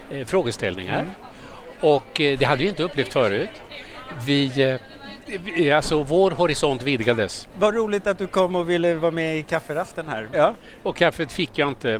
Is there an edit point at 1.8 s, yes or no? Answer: no